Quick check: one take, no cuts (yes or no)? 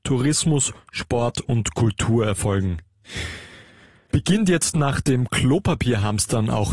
yes